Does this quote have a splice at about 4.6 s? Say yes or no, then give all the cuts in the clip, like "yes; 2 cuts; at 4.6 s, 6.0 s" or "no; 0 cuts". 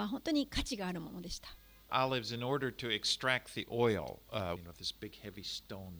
yes; 2 cuts; at 1.9 s, 4.6 s